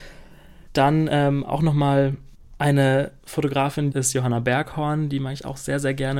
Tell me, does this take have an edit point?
yes; 1 cut; at 3.9 s

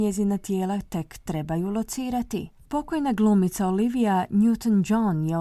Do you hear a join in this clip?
yes; 1 cut; at 2.6 s

